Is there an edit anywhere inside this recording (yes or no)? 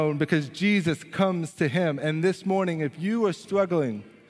no